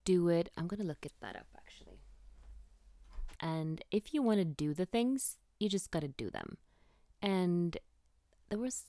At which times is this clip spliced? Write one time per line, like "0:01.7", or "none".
0:03.4